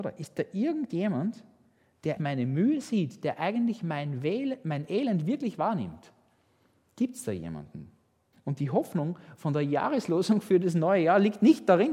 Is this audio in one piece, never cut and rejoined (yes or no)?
no